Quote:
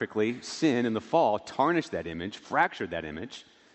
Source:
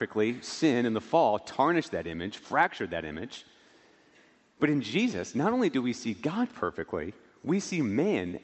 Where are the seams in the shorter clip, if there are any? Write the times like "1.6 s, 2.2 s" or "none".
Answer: none